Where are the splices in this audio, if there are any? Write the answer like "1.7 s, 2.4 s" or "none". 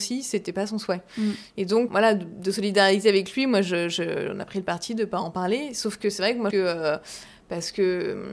1.9 s, 6.5 s